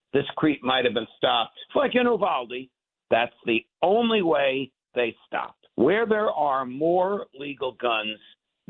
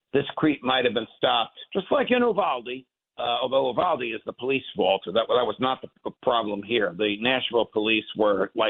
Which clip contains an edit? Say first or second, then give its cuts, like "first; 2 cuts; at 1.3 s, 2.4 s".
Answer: first; 3 cuts; at 1.7 s, 2.9 s, 5.7 s